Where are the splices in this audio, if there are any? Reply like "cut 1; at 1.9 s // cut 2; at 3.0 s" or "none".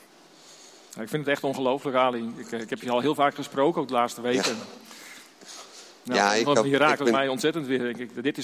none